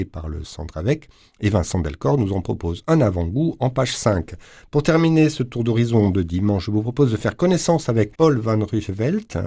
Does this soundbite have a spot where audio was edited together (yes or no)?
yes